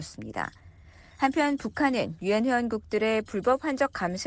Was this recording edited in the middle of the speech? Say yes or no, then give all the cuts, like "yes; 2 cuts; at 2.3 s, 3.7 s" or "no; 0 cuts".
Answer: no; 0 cuts